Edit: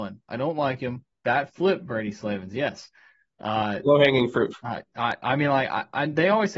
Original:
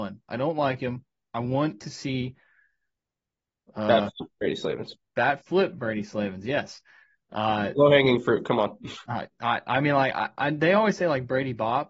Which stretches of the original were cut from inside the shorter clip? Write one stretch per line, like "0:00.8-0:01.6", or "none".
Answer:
0:01.1-0:05.0
0:08.4-0:09.0